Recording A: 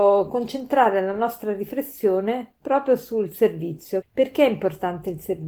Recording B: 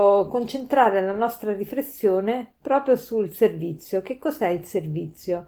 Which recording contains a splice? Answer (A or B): A